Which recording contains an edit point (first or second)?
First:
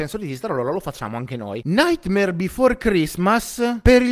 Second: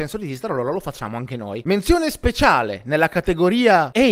first